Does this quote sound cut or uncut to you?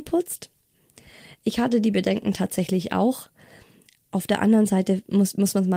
uncut